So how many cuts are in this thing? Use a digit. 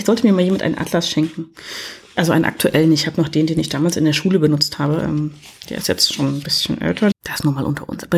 1